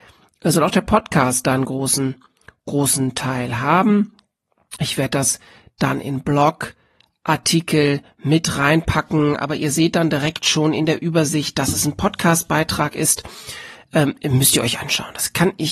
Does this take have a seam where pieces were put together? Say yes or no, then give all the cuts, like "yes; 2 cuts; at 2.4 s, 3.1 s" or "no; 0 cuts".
no; 0 cuts